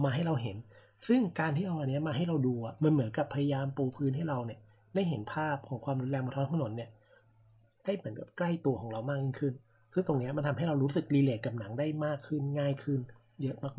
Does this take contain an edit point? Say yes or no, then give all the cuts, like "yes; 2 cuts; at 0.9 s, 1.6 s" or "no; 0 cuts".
no; 0 cuts